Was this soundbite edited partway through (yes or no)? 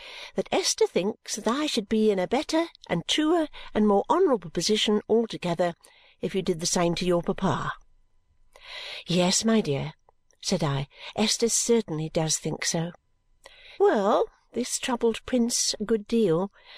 yes